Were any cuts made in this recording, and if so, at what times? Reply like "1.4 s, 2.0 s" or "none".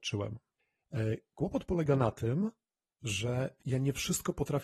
none